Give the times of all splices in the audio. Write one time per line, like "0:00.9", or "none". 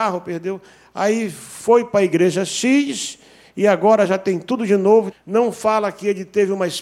0:05.1